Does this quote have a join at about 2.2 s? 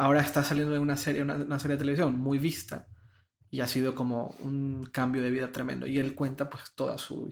no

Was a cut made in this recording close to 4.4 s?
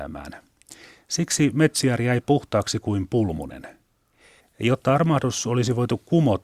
yes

